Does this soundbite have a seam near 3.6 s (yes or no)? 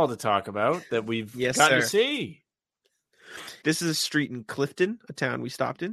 yes